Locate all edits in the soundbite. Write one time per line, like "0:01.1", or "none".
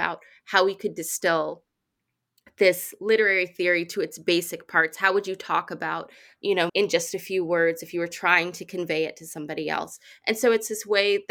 0:06.7

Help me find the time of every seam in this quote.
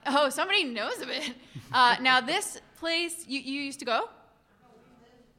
none

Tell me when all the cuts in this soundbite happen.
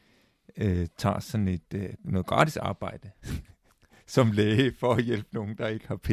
0:03.2

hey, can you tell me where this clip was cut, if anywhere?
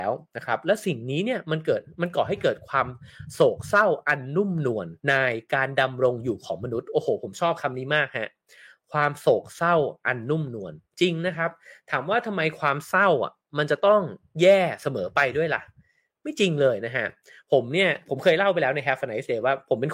0:05.0

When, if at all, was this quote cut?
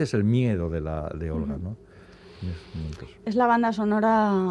none

